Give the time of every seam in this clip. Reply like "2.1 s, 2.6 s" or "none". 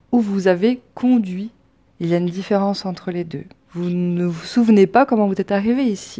1.9 s, 3.5 s